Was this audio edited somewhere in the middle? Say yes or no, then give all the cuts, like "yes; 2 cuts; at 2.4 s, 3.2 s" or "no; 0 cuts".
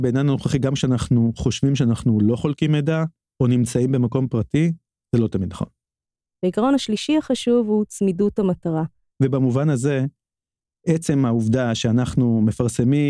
yes; 2 cuts; at 6.3 s, 9.1 s